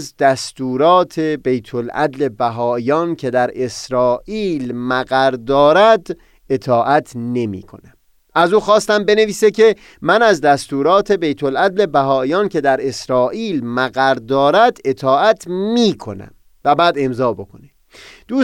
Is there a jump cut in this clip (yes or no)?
yes